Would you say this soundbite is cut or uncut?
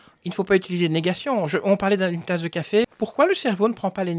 cut